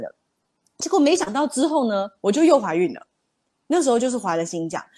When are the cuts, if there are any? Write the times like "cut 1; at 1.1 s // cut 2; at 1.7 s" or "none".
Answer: none